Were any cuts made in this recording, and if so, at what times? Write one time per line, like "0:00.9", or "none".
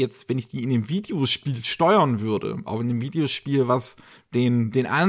none